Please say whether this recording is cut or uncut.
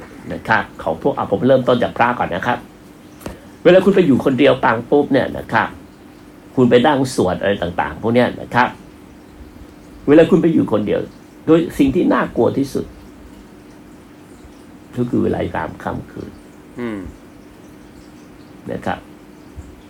cut